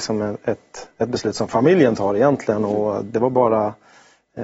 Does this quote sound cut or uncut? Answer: uncut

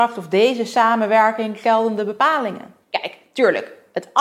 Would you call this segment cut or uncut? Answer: cut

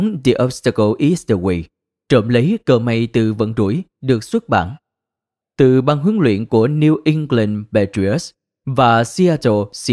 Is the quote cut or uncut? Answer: cut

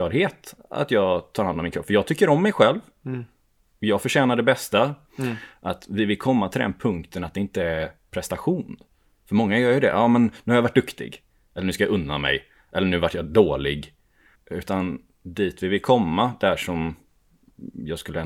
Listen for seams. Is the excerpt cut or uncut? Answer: cut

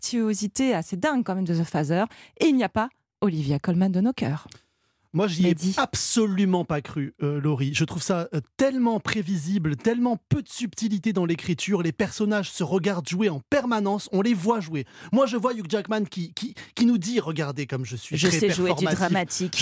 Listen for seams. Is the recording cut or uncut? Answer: uncut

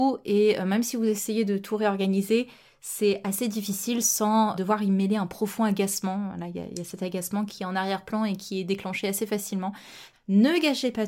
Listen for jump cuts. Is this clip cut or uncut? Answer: cut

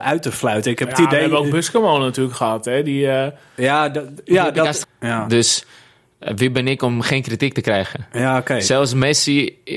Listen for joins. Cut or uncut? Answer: cut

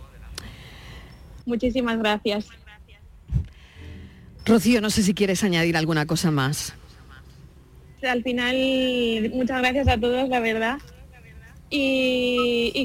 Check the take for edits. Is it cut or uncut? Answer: cut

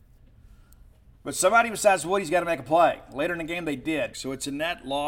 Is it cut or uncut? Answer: cut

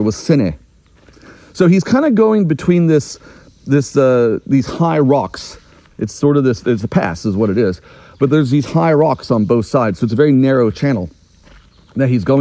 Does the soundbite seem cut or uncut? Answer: uncut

